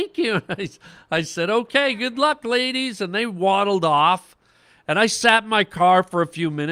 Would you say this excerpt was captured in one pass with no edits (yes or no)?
yes